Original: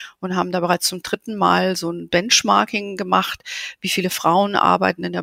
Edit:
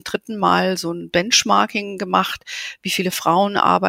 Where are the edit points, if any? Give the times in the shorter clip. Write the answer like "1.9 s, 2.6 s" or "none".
none